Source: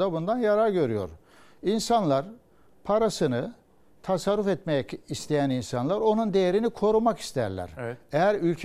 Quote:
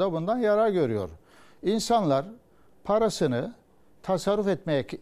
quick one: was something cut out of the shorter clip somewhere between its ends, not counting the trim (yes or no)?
no